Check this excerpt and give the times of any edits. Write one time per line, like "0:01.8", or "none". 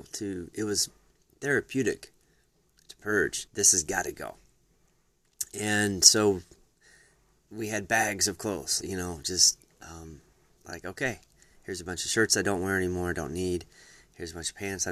0:03.5
0:08.8
0:10.6

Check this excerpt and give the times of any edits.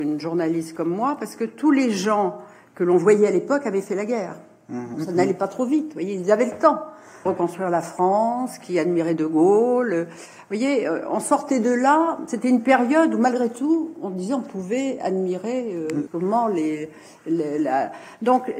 0:04.9
0:07.3
0:16.1

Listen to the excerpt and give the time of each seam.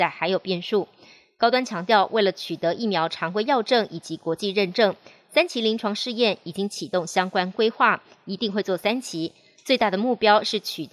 none

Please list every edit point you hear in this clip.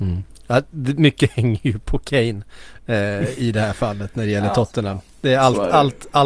none

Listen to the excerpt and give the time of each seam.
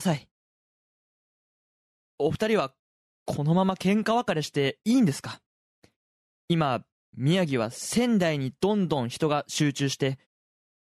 none

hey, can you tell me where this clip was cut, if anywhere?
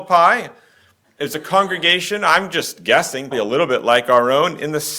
0:03.3

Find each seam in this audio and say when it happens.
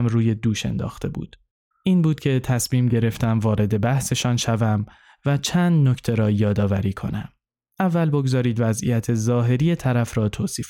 0:01.7

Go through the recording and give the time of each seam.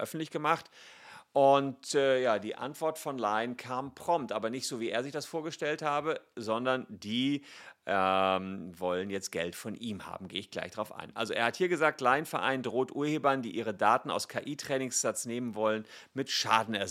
none

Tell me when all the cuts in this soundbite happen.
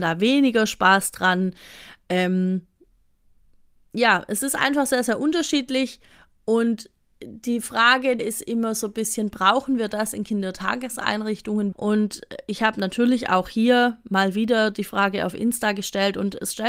0:08.2
0:11.7

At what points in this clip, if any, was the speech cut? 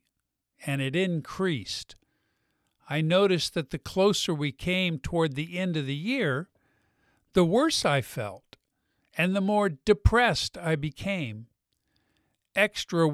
none

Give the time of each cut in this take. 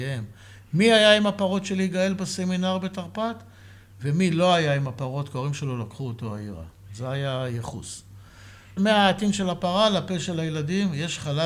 0:08.8

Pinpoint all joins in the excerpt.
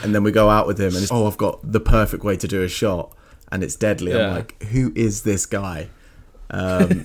0:01.1

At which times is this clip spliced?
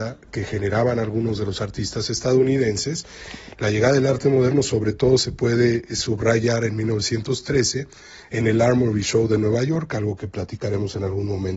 0:03.5

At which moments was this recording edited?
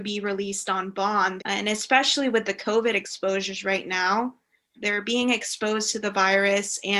0:01.4
0:04.7

